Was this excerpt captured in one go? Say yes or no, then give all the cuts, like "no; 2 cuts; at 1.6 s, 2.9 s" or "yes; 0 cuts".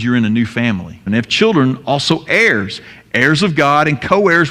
no; 1 cut; at 1.1 s